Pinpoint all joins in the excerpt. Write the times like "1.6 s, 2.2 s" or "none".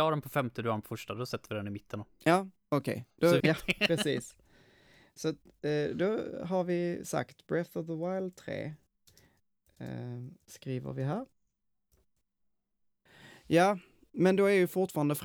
3.4 s